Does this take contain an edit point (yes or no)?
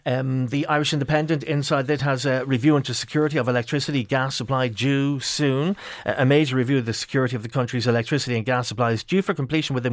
no